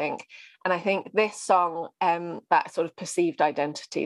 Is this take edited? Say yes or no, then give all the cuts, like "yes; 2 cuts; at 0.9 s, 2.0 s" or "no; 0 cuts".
yes; 1 cut; at 2.5 s